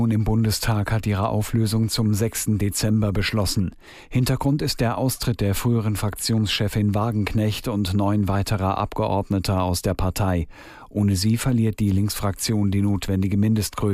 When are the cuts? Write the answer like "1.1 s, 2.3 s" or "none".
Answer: none